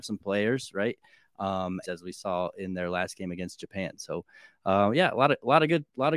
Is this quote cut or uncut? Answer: cut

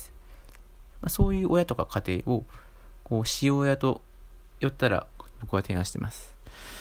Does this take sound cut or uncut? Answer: cut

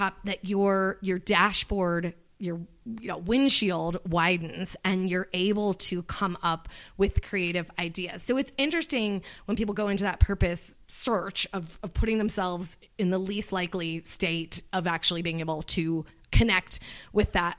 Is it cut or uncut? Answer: uncut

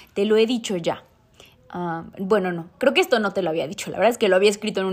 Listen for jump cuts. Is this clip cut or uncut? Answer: uncut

